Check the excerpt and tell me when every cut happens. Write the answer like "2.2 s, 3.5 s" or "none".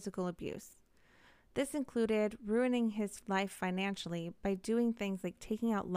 none